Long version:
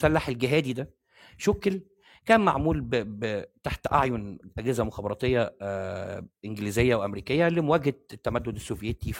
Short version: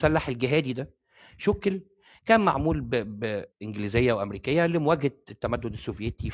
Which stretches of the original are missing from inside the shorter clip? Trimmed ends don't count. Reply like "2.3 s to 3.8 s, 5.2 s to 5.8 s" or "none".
3.5 s to 6.3 s